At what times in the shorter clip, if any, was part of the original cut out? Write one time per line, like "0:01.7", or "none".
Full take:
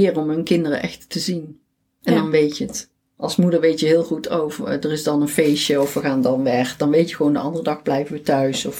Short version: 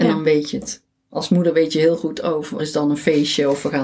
0:02.6